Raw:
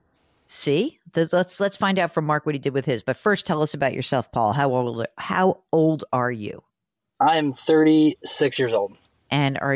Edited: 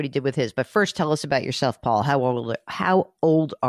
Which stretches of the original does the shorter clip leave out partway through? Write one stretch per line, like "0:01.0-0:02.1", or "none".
none